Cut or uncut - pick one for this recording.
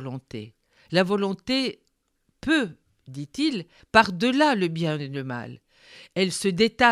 cut